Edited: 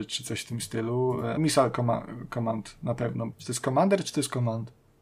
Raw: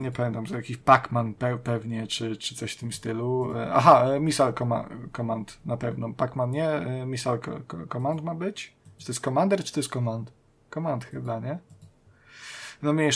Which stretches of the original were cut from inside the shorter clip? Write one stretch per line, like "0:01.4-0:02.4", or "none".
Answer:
0:03.7-0:04.2
0:06.1-0:08.9